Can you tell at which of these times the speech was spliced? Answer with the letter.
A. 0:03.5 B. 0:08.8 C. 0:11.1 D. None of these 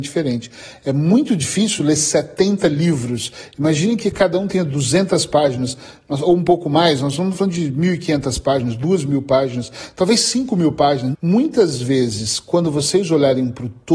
C